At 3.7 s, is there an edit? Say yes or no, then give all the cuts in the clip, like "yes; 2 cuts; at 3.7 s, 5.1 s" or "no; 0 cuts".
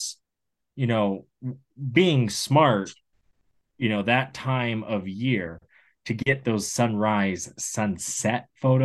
no; 0 cuts